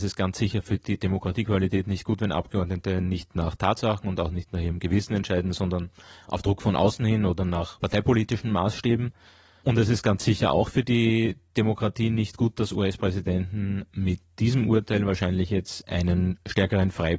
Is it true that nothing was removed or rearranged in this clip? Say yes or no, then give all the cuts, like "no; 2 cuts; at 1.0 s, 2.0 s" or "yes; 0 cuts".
yes; 0 cuts